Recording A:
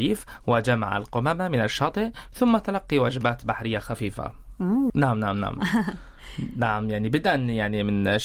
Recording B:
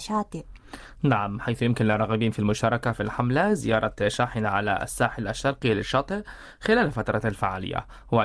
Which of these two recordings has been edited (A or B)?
A